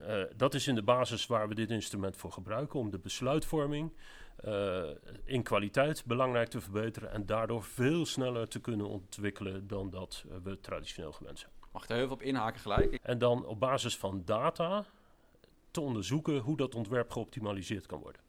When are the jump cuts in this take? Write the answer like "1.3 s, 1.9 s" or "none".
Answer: 13.0 s